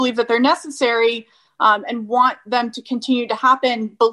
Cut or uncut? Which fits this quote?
uncut